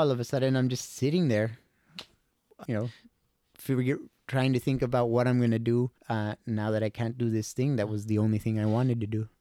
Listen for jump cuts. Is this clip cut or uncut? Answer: cut